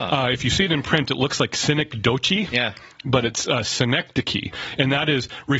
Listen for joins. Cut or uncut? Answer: uncut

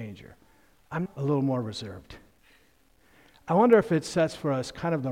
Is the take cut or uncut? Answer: cut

